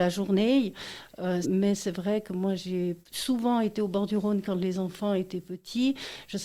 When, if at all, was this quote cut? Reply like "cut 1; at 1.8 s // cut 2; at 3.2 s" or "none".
cut 1; at 1.4 s // cut 2; at 3.0 s